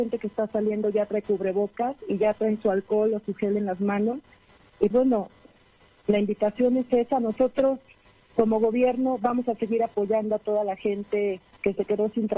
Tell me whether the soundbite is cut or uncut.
cut